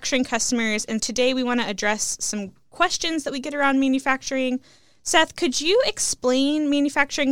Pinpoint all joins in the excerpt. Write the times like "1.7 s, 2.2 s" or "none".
1.0 s